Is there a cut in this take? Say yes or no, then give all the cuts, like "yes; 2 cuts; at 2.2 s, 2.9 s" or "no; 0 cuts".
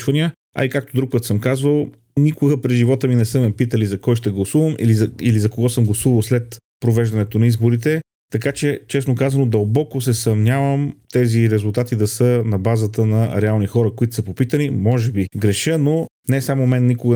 no; 0 cuts